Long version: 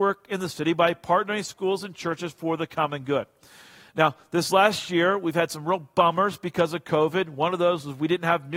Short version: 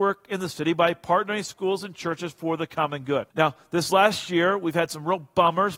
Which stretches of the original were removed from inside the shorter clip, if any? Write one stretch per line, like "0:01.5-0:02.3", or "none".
0:03.3-0:03.9